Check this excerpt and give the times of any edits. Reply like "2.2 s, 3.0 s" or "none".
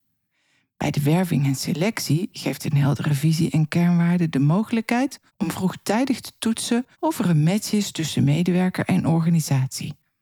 5.3 s, 6.9 s

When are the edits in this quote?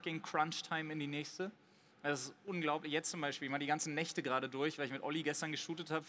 none

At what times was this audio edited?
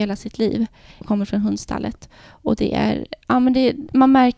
1.0 s

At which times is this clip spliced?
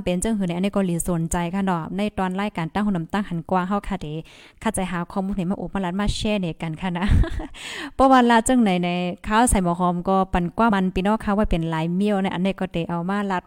10.7 s

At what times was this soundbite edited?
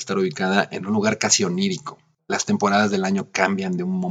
2.2 s

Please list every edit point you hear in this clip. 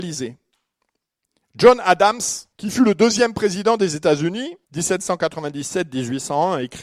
2.5 s, 4.6 s

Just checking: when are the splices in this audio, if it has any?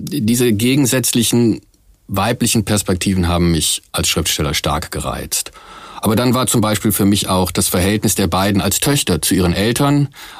none

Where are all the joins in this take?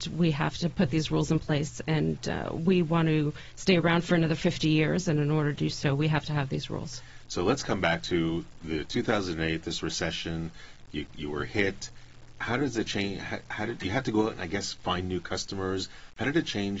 none

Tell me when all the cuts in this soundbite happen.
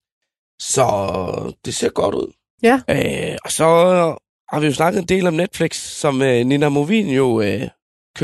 2.9 s

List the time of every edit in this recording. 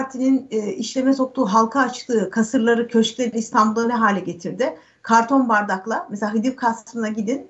none

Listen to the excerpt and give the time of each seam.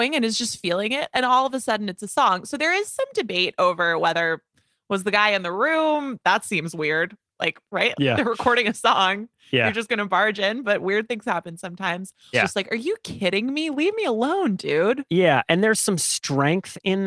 7.9 s, 12.3 s

